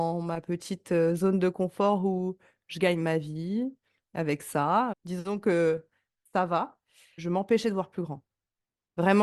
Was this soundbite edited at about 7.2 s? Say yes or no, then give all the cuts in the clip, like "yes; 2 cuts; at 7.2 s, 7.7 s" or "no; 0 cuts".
yes; 2 cuts; at 4.9 s, 7.2 s